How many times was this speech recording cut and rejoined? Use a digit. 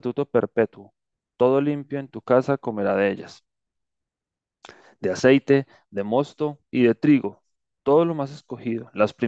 0